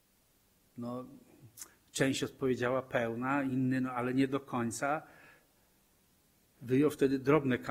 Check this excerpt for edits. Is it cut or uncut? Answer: uncut